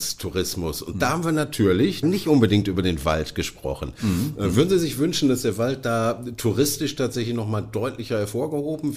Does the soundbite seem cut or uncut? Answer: cut